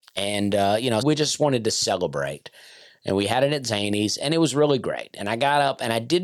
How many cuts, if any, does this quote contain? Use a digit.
1